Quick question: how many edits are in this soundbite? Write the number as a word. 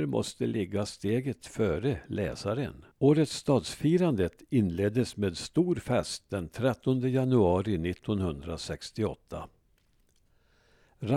one